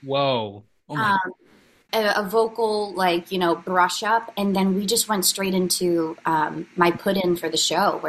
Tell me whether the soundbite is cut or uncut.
cut